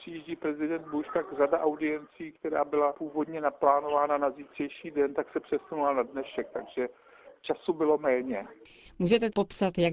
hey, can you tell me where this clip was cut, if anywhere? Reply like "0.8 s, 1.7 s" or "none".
8.8 s